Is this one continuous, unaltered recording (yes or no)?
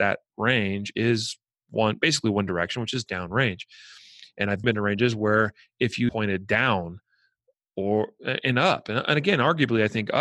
no